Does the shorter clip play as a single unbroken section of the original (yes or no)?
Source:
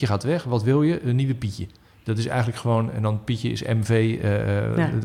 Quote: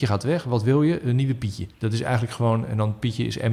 no